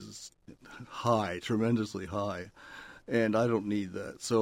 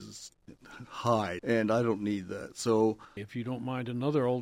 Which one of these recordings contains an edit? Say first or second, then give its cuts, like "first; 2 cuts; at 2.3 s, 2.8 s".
second; 2 cuts; at 1.4 s, 3.2 s